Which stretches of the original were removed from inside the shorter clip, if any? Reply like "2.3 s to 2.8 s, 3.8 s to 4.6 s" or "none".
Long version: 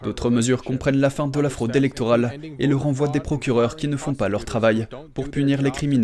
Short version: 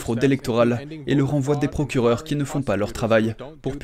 none